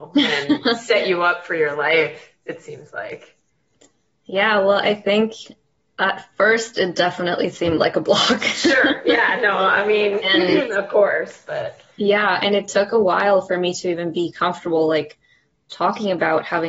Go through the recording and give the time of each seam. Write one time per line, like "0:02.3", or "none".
none